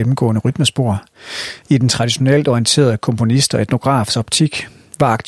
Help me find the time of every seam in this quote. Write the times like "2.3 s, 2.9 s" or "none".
1.6 s